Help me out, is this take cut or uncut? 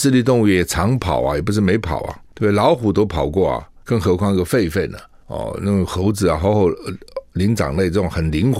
uncut